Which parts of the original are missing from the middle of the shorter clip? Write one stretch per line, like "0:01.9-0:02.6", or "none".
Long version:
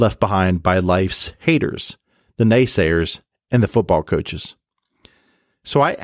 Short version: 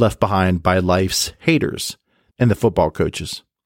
0:02.3-0:03.4